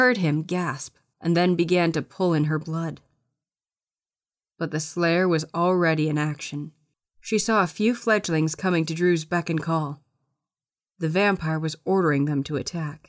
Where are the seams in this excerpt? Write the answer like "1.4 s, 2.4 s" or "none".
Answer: 1.1 s